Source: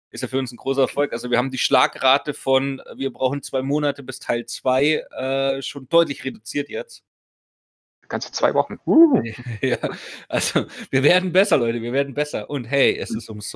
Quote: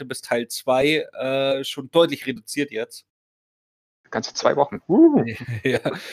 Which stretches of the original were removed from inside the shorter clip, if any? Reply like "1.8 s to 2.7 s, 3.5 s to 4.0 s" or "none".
none